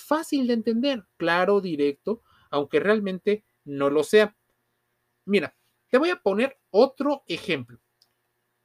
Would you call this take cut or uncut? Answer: uncut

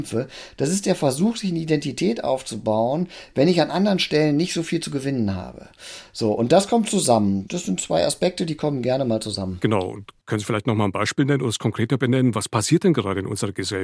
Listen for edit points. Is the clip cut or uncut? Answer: uncut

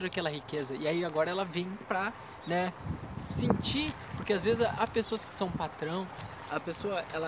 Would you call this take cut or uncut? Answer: uncut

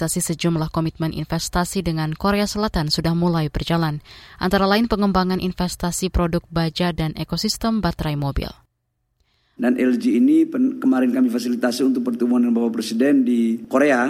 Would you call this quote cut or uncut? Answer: cut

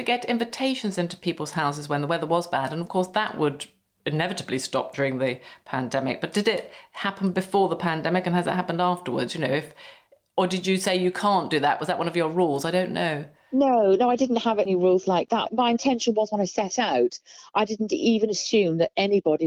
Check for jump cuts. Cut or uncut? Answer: uncut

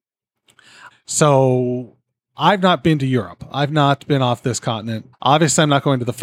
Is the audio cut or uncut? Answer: cut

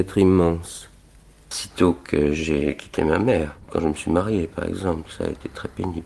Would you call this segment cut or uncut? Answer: cut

